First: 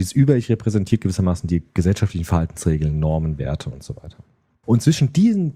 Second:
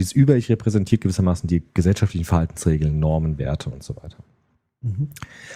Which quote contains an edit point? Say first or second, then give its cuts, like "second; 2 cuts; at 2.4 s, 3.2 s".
first; 1 cut; at 4.6 s